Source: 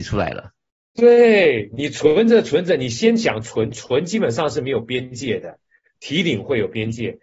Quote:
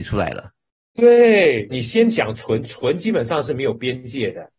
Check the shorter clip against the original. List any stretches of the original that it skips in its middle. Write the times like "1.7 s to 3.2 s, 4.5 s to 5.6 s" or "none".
1.7 s to 2.8 s